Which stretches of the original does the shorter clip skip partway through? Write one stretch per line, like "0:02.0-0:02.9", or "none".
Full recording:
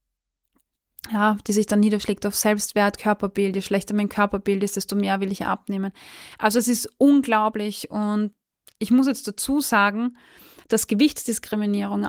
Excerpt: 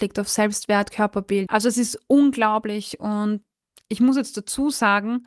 0:03.5-0:06.4